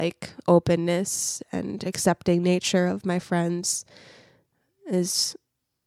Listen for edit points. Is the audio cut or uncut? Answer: uncut